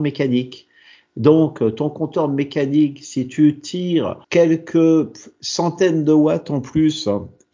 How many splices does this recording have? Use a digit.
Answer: 1